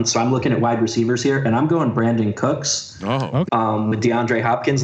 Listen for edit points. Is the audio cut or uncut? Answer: cut